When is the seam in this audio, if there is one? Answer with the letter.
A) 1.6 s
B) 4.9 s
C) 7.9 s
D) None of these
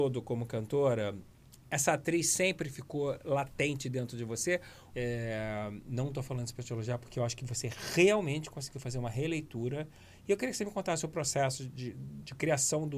B